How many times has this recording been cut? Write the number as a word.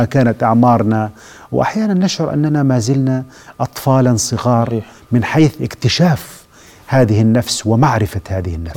zero